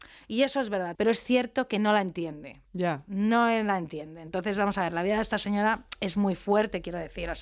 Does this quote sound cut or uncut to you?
cut